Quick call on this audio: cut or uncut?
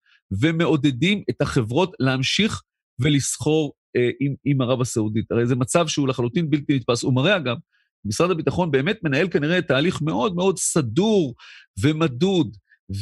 uncut